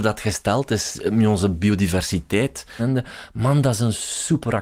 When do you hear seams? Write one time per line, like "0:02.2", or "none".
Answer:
0:02.8